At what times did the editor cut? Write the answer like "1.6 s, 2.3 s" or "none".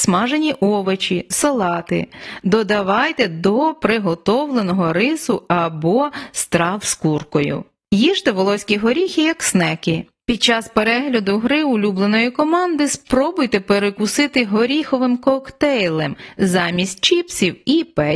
none